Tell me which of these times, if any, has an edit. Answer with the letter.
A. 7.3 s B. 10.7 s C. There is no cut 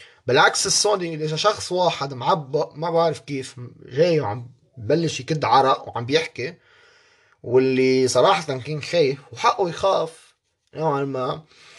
C